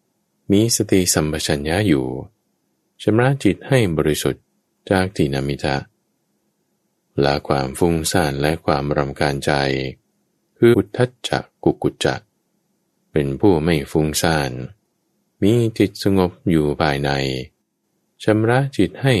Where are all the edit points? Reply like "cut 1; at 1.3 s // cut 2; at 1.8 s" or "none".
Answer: cut 1; at 10.7 s